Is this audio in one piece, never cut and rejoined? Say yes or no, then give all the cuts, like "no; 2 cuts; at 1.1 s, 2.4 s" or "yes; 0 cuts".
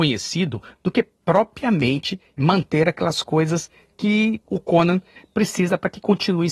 yes; 0 cuts